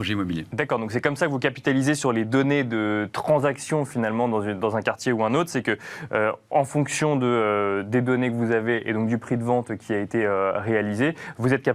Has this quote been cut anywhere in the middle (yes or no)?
no